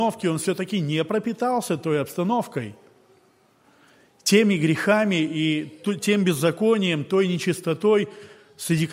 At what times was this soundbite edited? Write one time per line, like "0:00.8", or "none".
none

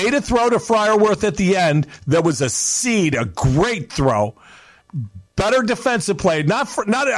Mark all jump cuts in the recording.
none

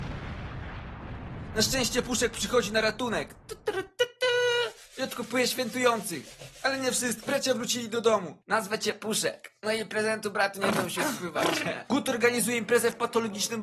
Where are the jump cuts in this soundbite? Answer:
0:08.4

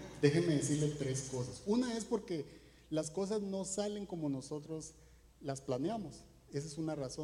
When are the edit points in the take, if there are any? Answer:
none

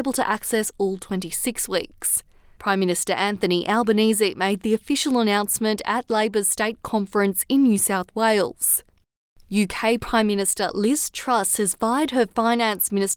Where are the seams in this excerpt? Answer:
none

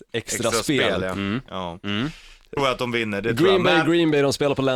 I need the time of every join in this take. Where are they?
0:01.5
0:02.6

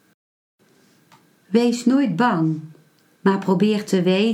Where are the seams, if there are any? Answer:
0:03.2

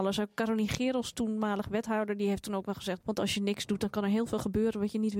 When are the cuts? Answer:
0:03.0

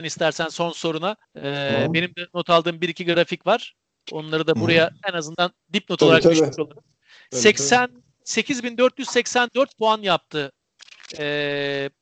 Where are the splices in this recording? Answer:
0:01.2

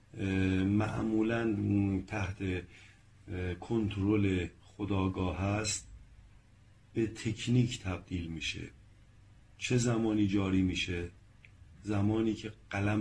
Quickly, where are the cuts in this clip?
none

